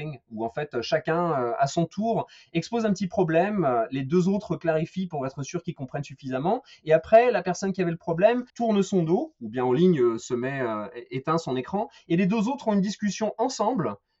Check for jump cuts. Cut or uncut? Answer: cut